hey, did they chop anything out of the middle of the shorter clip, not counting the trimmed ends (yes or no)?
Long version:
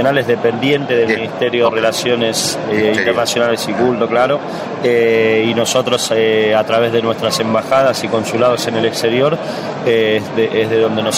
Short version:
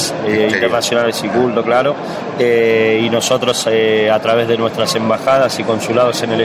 no